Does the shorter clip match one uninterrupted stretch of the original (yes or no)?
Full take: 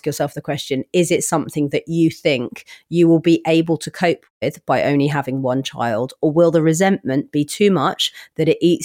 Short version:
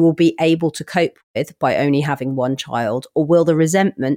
yes